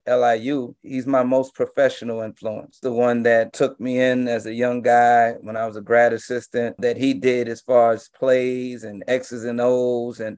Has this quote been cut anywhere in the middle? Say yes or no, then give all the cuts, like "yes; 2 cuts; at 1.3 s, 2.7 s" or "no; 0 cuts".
yes; 1 cut; at 6.8 s